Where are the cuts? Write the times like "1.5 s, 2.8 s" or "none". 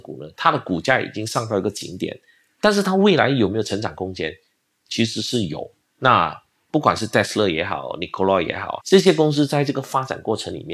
5.9 s, 8.8 s